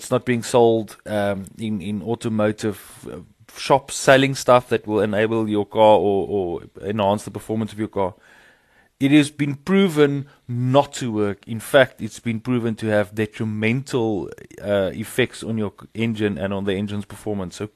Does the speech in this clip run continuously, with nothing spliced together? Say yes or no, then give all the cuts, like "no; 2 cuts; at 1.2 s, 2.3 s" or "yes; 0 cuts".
yes; 0 cuts